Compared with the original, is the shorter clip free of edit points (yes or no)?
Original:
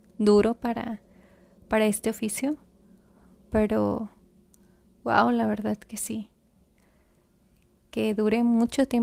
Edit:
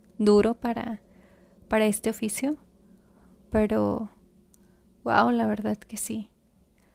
yes